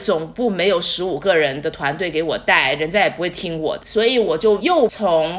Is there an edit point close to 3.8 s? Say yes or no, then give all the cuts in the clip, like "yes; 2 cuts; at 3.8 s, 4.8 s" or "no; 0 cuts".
yes; 1 cut; at 3.8 s